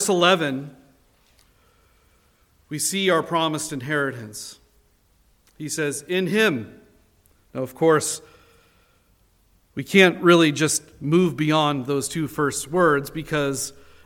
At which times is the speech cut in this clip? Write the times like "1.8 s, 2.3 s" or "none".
none